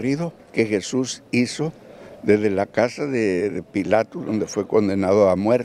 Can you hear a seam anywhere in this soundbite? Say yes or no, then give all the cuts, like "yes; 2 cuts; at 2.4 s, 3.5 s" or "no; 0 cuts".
no; 0 cuts